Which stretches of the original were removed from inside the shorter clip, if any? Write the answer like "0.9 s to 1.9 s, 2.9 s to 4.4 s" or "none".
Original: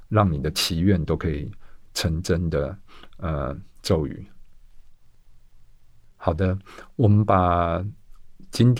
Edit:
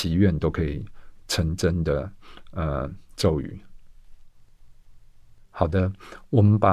none